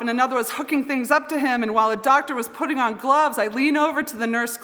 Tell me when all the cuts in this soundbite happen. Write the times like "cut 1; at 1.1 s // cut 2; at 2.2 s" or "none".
none